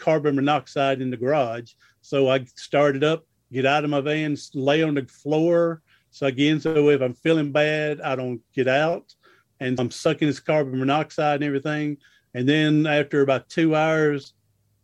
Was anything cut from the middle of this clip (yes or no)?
yes